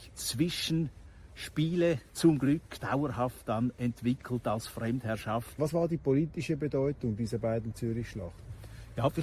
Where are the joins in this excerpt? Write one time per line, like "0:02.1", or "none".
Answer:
0:02.8
0:05.6